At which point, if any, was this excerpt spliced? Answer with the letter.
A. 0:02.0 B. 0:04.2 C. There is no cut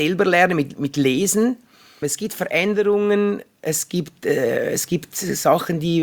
A